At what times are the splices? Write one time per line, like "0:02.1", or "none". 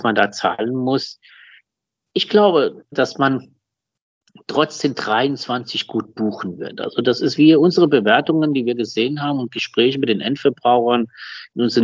0:02.9